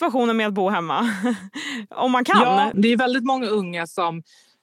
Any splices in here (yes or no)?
yes